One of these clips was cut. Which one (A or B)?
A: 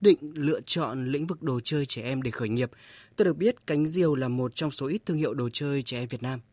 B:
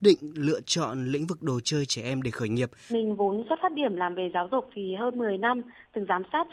B